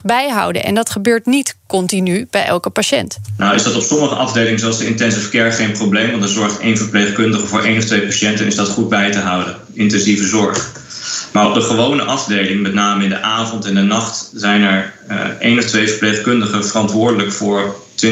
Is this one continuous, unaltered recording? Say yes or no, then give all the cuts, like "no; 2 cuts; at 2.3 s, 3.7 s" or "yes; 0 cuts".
yes; 0 cuts